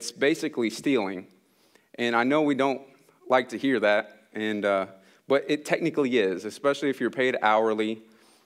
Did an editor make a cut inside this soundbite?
no; 0 cuts

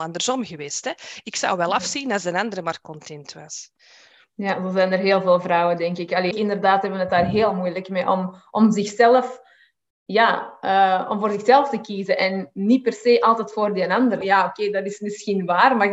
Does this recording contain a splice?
yes; 2 cuts; at 6.3 s, 14.2 s

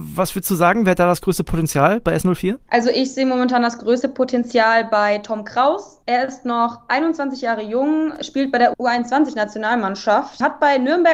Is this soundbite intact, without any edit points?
yes; 0 cuts

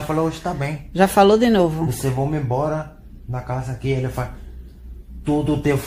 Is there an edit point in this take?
no; 0 cuts

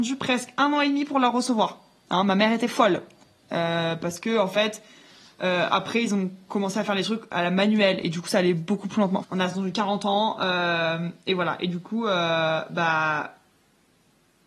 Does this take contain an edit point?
yes; 1 cut; at 9.2 s

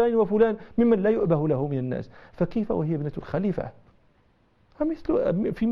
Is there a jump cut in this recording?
no; 0 cuts

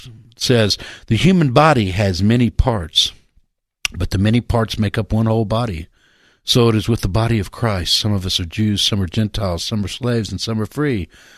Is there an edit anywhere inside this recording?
no; 0 cuts

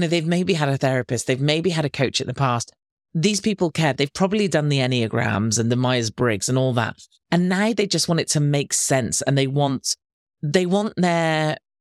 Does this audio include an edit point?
no; 0 cuts

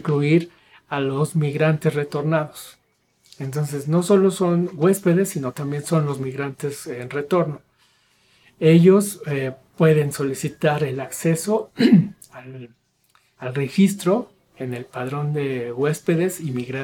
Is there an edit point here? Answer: no; 0 cuts

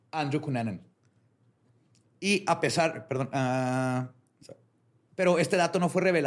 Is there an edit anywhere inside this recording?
yes; 1 cut; at 5.1 s

